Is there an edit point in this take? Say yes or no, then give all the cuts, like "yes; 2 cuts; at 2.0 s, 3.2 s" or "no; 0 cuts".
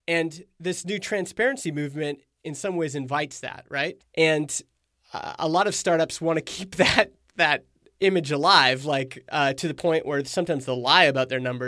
yes; 1 cut; at 4.0 s